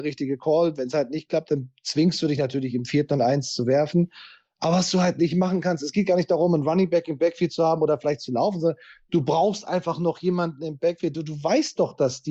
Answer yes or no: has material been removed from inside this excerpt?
no